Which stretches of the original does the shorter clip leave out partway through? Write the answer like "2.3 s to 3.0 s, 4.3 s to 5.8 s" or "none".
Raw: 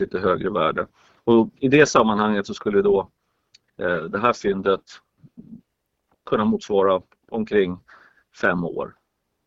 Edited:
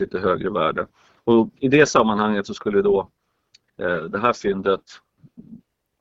none